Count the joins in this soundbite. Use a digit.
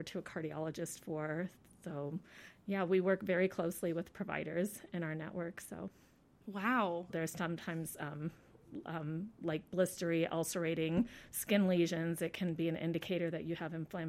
1